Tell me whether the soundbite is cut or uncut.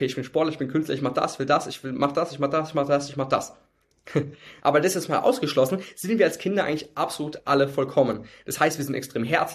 cut